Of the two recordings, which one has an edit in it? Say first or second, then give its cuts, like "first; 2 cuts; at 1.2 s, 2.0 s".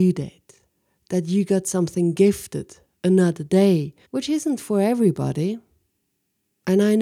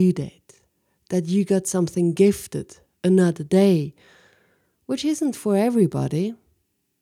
first; 1 cut; at 4.0 s